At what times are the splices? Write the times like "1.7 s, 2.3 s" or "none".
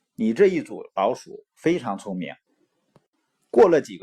2.5 s